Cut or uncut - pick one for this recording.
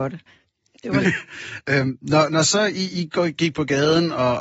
cut